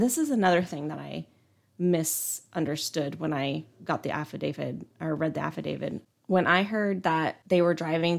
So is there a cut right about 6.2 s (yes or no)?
no